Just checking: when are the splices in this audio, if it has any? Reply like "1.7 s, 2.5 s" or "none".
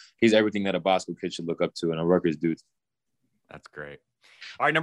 none